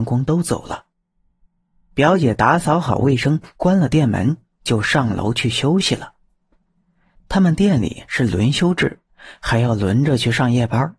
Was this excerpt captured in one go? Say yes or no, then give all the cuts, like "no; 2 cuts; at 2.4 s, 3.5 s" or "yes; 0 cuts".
no; 1 cut; at 7.2 s